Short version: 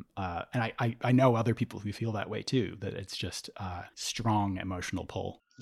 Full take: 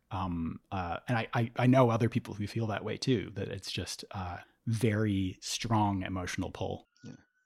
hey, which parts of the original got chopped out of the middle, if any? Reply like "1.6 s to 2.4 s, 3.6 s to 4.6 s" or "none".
4.5 s to 5.4 s